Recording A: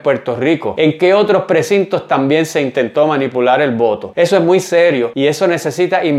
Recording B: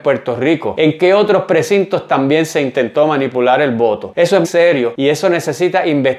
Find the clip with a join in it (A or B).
B